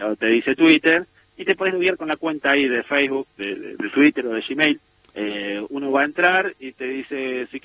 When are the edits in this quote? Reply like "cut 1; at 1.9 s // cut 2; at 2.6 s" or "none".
cut 1; at 3.4 s // cut 2; at 5.0 s